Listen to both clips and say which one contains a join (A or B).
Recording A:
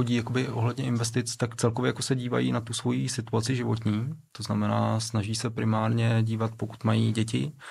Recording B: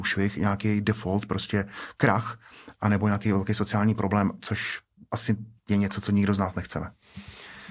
B